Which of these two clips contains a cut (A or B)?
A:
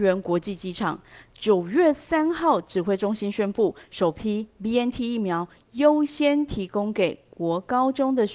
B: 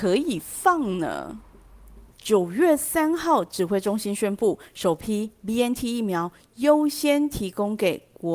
B